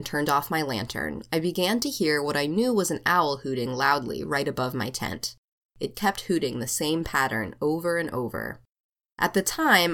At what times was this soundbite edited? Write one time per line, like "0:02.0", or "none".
0:05.9